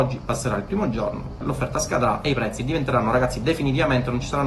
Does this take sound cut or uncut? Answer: cut